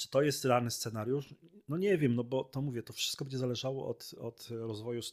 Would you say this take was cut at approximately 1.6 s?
no; 1 cut; at 4.2 s

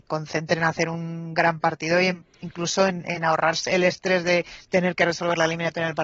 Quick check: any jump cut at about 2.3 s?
yes; 2 cuts; at 2.3 s, 3.7 s

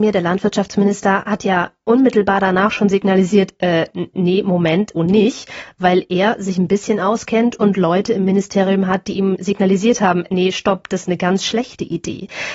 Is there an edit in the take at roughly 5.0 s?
yes; 2 cuts; at 5.0 s, 10.3 s

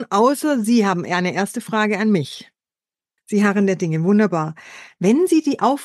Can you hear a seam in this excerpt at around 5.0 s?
no; 1 cut; at 3.2 s

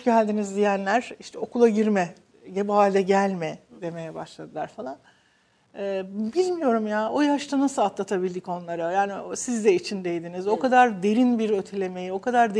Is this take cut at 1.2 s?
no; 0 cuts

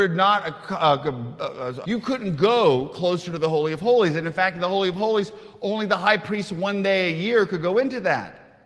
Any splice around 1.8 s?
yes; 1 cut; at 1.8 s

